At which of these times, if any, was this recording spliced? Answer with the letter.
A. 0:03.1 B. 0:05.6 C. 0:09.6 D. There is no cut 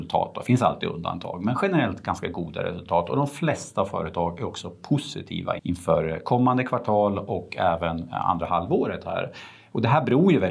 B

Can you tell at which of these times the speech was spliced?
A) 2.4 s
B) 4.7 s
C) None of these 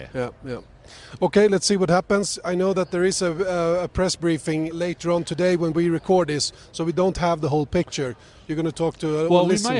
B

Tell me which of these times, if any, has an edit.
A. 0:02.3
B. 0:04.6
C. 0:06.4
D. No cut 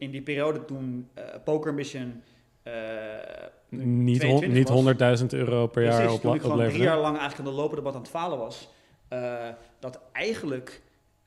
D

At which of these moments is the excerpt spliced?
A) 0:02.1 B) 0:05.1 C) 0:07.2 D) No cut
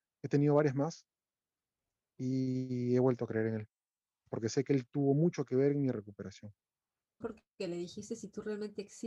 C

